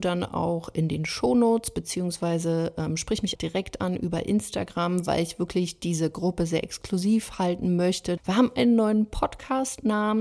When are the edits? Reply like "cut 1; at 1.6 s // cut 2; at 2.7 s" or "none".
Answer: cut 1; at 3.4 s // cut 2; at 8.2 s